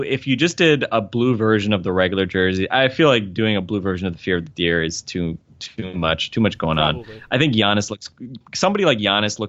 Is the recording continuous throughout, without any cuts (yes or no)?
yes